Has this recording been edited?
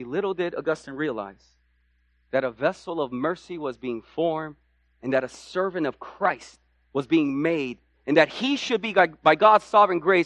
no; 0 cuts

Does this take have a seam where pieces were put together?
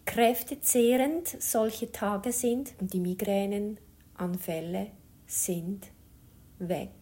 yes; 1 cut; at 2.7 s

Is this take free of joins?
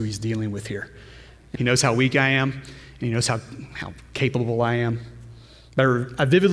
no; 1 cut; at 1.6 s

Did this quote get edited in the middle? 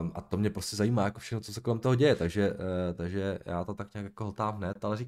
no; 0 cuts

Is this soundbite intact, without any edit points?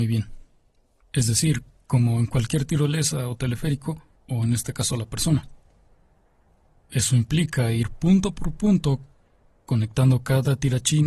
no; 2 cuts; at 1.0 s, 4.1 s

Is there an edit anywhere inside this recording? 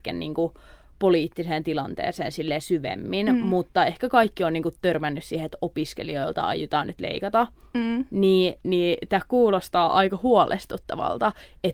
no; 0 cuts

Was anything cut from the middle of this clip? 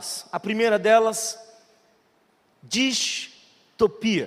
no; 0 cuts

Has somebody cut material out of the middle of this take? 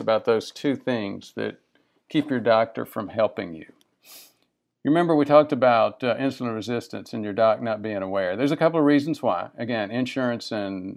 no; 0 cuts

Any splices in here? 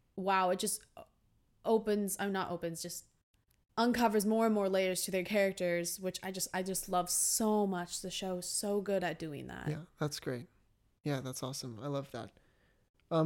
no; 0 cuts

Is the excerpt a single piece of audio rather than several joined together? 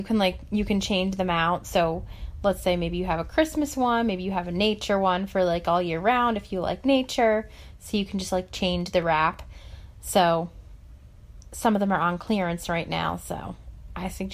yes; 0 cuts

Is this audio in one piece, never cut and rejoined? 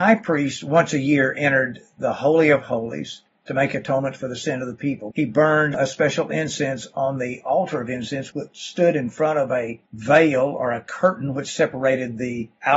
no; 2 cuts; at 5.1 s, 9.9 s

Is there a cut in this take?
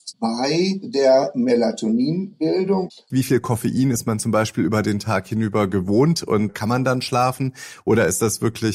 yes; 2 cuts; at 3.1 s, 6.5 s

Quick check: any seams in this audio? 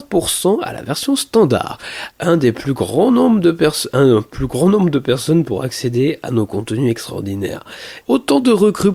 yes; 2 cuts; at 2.1 s, 8.0 s

